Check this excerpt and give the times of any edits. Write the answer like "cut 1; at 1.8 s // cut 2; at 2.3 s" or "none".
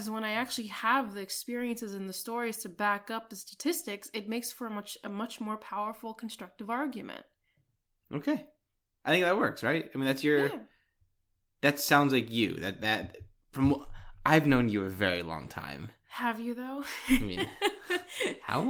none

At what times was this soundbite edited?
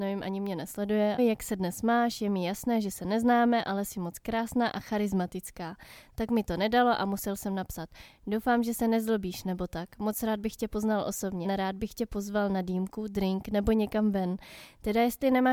cut 1; at 1.2 s // cut 2; at 11.4 s

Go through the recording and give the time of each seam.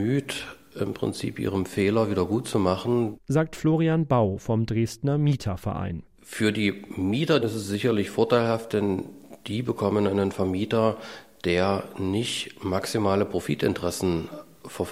cut 1; at 7.4 s

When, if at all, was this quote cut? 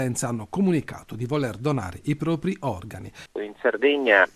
cut 1; at 3.3 s

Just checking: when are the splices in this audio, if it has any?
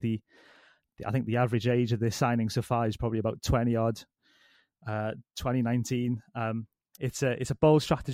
cut 1; at 6.9 s

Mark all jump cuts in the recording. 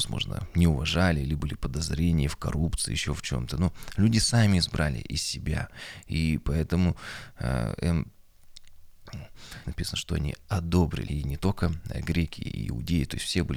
cut 1; at 9.6 s // cut 2; at 11.1 s

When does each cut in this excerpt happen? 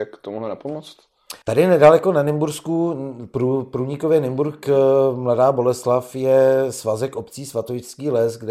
cut 1; at 1.4 s

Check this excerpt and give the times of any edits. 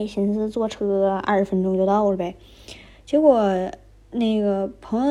none

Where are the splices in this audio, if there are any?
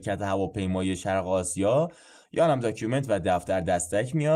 none

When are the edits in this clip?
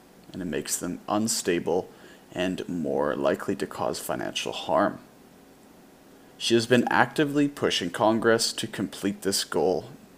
cut 1; at 6.3 s

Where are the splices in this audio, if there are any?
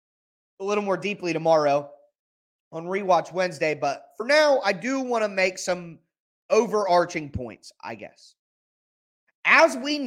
none

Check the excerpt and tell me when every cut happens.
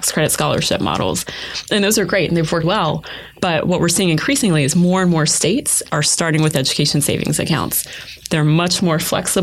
cut 1; at 2.6 s // cut 2; at 5.9 s

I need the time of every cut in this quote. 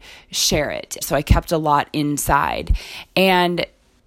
cut 1; at 1.0 s

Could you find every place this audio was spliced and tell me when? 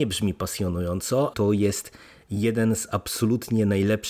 cut 1; at 1.3 s

